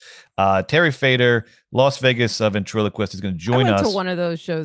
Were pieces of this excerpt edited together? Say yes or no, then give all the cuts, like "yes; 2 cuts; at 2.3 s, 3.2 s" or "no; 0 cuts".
no; 0 cuts